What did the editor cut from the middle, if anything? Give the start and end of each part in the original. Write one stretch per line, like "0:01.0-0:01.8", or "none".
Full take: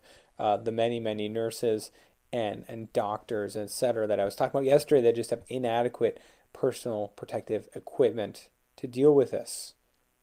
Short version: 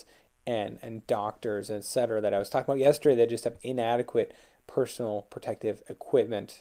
none